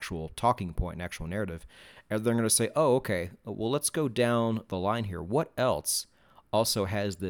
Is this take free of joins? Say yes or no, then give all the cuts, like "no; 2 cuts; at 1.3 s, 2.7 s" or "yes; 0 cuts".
yes; 0 cuts